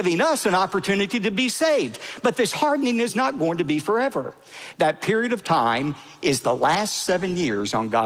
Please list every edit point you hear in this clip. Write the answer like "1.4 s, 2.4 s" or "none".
4.7 s

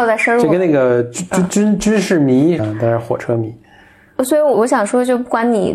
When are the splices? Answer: 2.6 s, 4.5 s

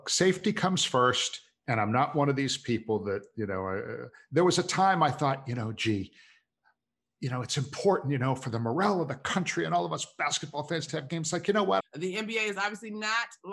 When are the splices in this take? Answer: 11.8 s

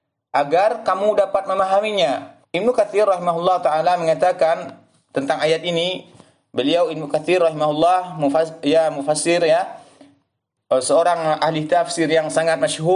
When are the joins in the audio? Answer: 2.4 s

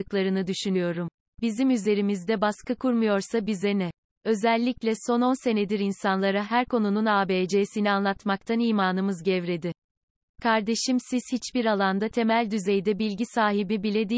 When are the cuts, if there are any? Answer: 1.2 s

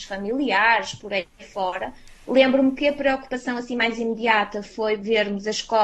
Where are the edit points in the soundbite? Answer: none

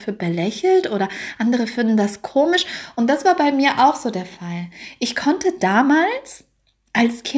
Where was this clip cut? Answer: none

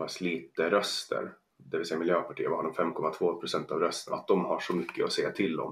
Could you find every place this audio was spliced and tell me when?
4.1 s

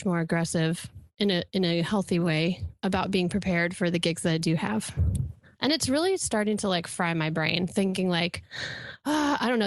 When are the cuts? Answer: 5.6 s

